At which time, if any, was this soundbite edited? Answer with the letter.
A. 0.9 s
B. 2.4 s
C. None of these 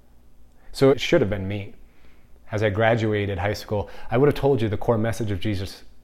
A